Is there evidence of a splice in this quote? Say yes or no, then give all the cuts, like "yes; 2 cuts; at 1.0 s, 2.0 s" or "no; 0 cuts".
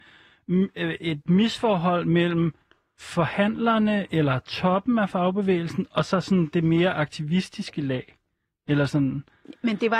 no; 0 cuts